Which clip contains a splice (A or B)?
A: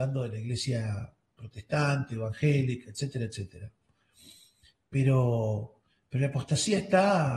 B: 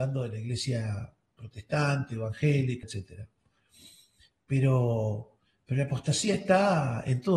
B